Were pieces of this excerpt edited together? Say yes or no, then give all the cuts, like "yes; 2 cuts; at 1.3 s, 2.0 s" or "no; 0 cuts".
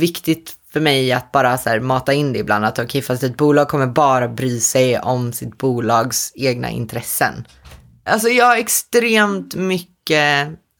yes; 1 cut; at 8.1 s